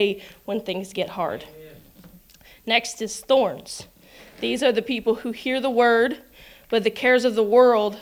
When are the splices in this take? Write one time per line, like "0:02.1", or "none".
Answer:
none